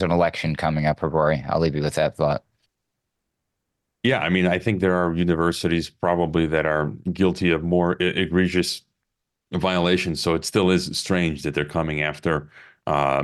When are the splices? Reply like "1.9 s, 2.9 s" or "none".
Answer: none